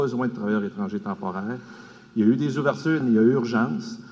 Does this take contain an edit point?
yes; 1 cut; at 3.0 s

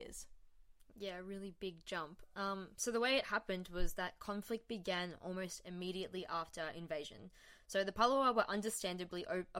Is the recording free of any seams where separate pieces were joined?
yes; 0 cuts

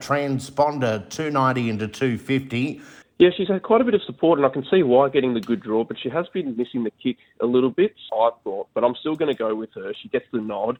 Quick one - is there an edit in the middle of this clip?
yes; 2 cuts; at 3.0 s, 8.1 s

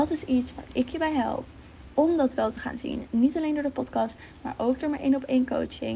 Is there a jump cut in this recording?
no; 0 cuts

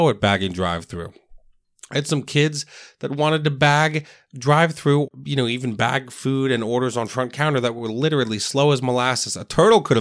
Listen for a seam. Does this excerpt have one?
no; 0 cuts

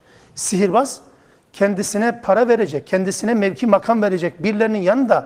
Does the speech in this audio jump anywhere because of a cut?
yes; 1 cut; at 2.8 s

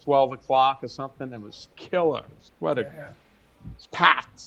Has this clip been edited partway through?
yes; 1 cut; at 2.9 s

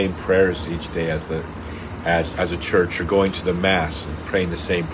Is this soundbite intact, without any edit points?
no; 1 cut; at 2.3 s

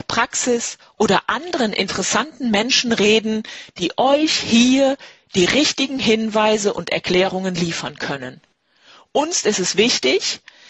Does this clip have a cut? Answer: no; 0 cuts

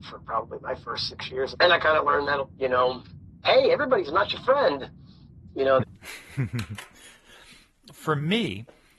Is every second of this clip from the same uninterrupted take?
no; 3 cuts; at 1.5 s, 5.8 s, 7.9 s

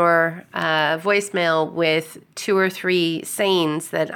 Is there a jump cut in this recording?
no; 0 cuts

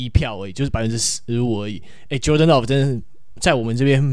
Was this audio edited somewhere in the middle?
no; 0 cuts

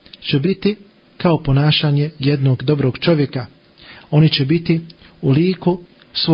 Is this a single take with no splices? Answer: no; 1 cut; at 4.0 s

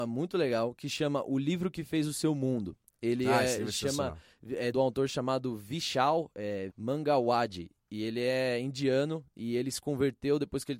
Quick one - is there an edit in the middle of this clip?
yes; 2 cuts; at 4.7 s, 6.7 s

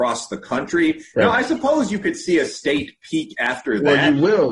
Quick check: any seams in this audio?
no; 0 cuts

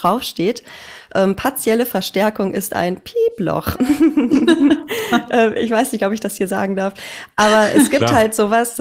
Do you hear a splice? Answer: no; 0 cuts

